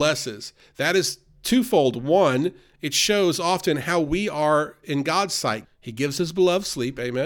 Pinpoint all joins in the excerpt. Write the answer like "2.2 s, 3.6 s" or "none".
5.6 s